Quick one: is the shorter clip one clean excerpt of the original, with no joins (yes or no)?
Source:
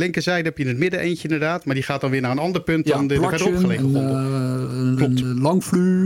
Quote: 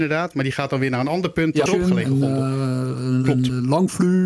no